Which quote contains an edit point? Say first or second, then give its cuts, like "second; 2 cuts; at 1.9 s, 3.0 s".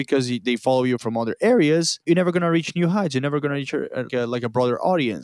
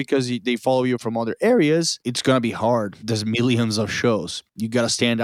second; 1 cut; at 2.0 s